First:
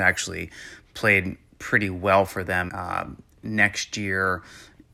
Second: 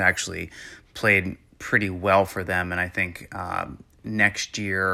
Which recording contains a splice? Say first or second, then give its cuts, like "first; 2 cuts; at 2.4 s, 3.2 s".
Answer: first; 1 cut; at 2.7 s